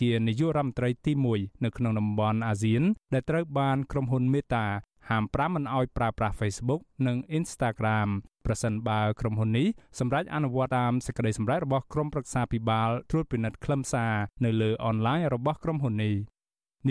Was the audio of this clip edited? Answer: yes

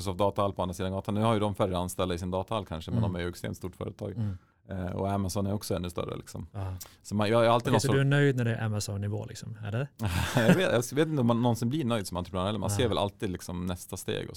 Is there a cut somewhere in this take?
no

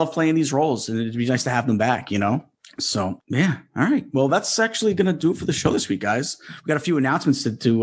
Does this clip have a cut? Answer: no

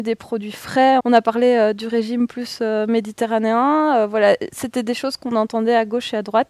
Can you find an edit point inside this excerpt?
yes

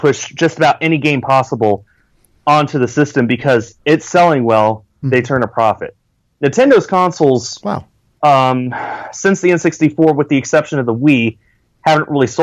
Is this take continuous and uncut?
no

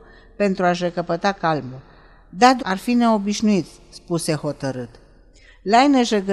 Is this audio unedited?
no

